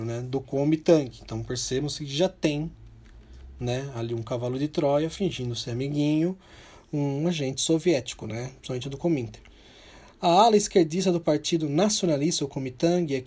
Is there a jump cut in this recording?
no; 0 cuts

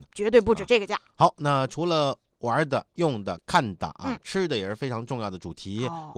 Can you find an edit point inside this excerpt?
no; 0 cuts

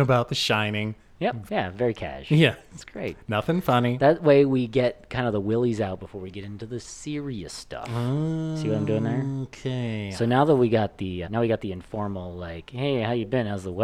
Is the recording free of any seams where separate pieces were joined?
no; 2 cuts; at 1.5 s, 11.2 s

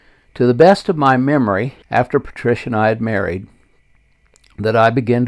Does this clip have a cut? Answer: yes; 1 cut; at 1.8 s

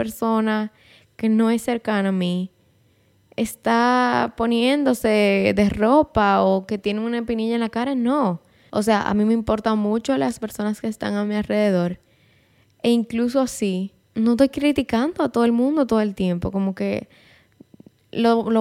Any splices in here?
no; 0 cuts

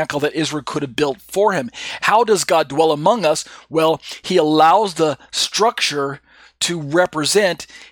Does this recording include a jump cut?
yes; 1 cut; at 2.0 s

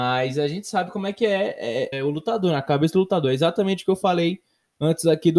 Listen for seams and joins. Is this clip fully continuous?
no; 1 cut; at 1.9 s

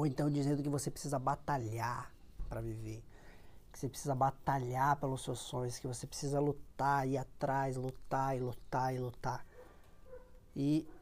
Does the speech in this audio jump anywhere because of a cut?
no; 0 cuts

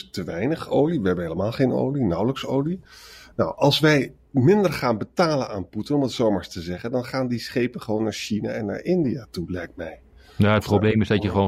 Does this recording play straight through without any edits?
yes; 0 cuts

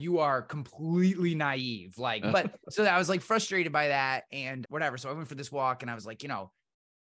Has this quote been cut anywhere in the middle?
yes; 2 cuts; at 2.3 s, 4.6 s

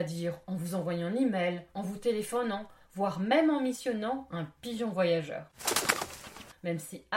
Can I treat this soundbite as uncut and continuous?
no; 2 cuts; at 1.7 s, 2.8 s

